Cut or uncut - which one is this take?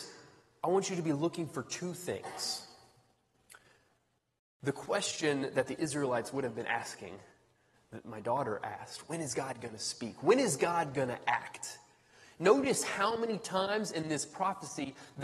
uncut